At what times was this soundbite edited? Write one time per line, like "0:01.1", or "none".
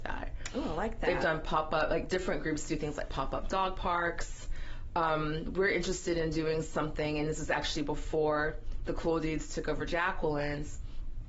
none